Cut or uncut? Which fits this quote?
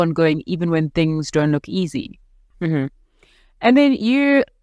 cut